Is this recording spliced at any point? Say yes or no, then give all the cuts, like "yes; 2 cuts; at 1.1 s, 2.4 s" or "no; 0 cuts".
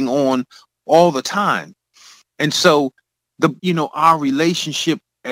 yes; 1 cut; at 3.6 s